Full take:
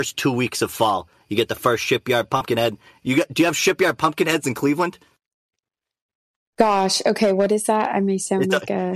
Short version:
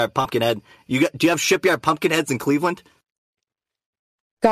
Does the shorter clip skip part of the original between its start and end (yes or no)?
no